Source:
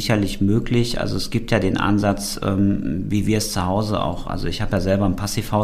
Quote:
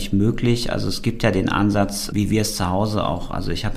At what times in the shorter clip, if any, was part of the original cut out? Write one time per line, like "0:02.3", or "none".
0:02.1